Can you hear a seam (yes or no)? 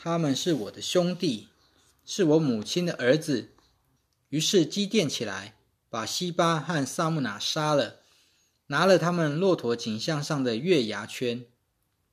yes